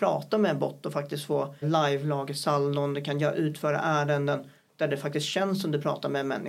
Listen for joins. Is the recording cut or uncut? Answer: cut